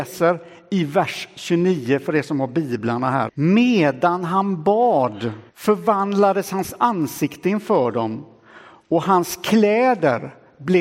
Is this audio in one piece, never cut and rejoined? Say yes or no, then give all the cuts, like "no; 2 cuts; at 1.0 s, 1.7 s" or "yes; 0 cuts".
no; 2 cuts; at 3.3 s, 5.5 s